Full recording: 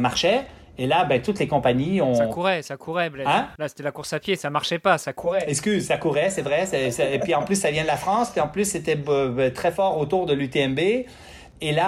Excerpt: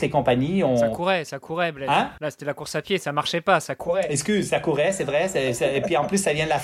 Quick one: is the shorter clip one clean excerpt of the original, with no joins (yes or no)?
yes